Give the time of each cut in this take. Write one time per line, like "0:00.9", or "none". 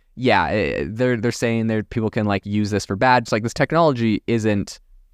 0:03.3